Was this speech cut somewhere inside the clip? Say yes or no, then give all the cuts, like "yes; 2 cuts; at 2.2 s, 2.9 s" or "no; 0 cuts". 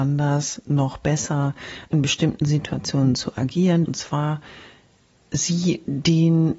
yes; 1 cut; at 3.8 s